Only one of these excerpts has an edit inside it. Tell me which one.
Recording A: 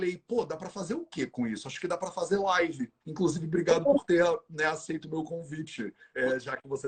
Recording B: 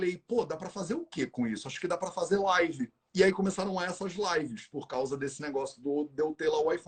A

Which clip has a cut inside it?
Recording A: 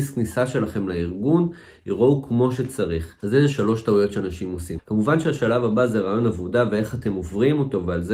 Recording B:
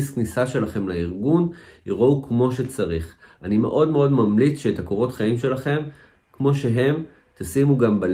A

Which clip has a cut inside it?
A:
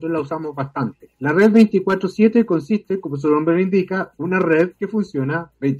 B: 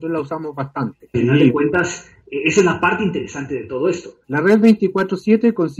B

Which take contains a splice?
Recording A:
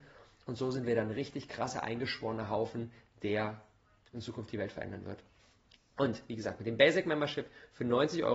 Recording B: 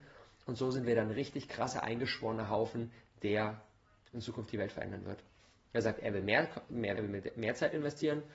B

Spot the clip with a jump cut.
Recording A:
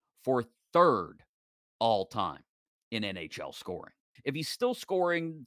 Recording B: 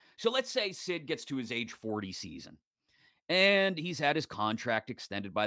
A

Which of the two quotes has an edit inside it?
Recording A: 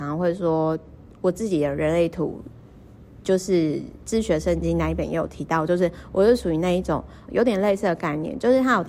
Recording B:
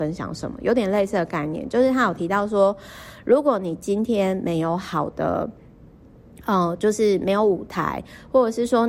A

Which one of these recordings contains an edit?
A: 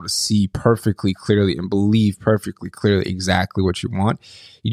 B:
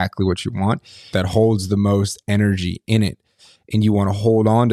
B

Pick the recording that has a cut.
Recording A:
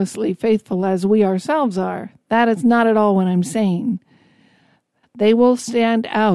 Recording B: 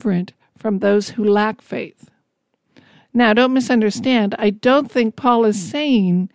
A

